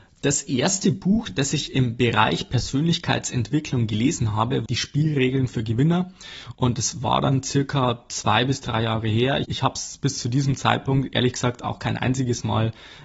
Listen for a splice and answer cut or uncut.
cut